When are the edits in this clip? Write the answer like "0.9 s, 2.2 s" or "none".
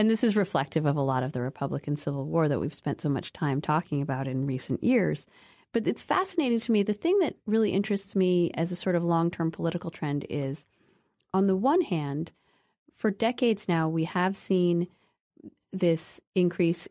none